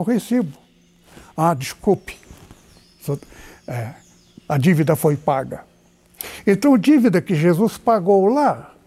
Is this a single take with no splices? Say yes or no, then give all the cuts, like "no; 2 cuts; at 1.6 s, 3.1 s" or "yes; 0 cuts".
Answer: yes; 0 cuts